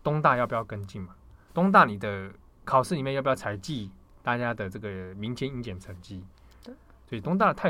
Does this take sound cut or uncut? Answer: uncut